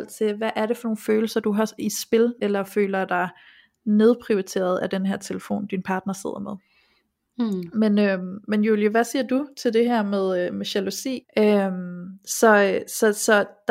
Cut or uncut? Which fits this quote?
cut